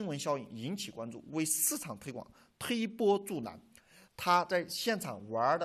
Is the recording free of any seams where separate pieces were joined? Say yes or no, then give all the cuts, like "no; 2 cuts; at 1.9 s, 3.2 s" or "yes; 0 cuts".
no; 1 cut; at 4.1 s